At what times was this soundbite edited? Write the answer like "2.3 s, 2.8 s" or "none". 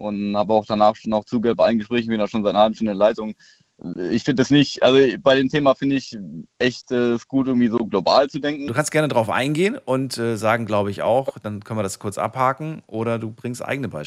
8.7 s